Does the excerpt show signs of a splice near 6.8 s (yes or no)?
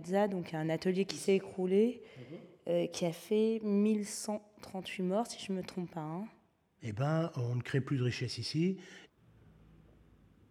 yes